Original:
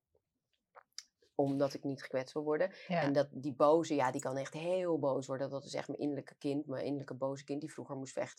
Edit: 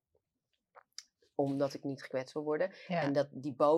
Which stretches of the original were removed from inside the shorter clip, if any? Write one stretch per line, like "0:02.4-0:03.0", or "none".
none